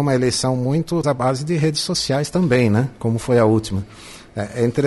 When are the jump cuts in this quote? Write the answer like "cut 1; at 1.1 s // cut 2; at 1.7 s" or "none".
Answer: cut 1; at 1.0 s